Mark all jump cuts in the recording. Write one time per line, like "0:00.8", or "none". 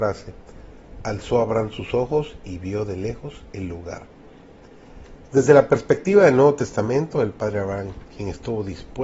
0:05.3

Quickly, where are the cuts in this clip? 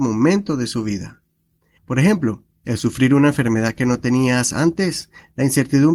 0:01.8

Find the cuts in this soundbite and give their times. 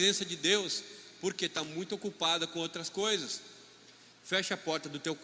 none

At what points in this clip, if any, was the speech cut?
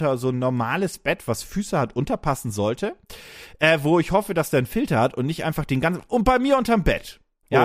none

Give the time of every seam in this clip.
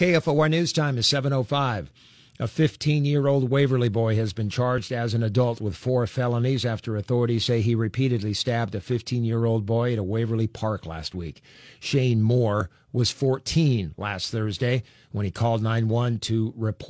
none

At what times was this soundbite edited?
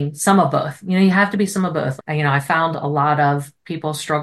0:02.0

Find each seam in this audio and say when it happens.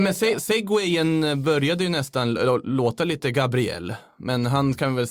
none

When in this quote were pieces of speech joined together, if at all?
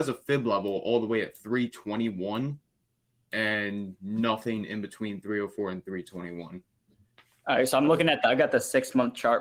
none

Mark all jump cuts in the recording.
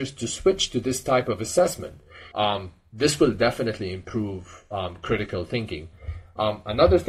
0:02.3

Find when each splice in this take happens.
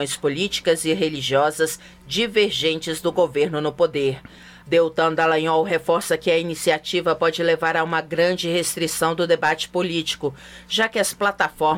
0:04.6

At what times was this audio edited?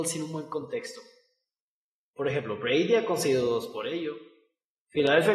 none

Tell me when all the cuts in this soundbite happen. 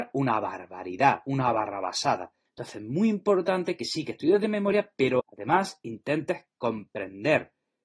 0:02.5
0:05.2

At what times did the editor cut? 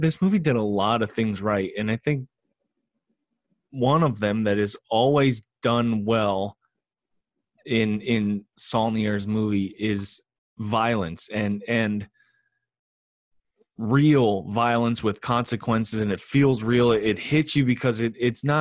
0:08.5

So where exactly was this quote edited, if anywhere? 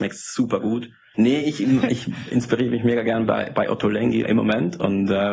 0:01.1
0:04.2

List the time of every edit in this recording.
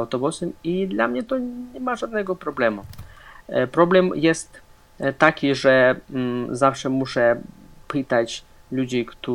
none

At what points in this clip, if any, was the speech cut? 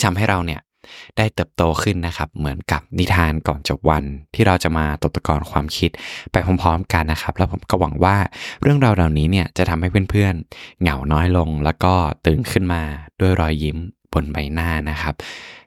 0:07.0

